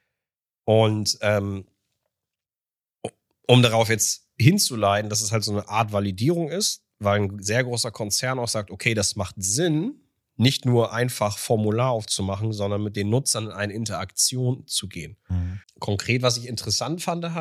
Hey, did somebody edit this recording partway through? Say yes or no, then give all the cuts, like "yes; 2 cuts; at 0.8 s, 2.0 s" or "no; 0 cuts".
yes; 1 cut; at 15.6 s